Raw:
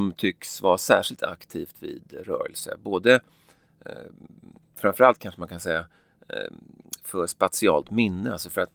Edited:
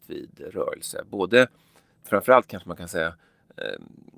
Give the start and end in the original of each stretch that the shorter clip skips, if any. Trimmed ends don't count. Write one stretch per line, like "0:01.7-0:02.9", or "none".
0:03.7-0:04.7